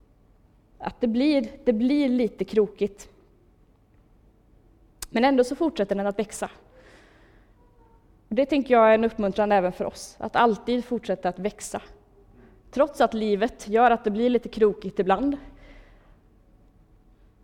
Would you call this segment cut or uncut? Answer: uncut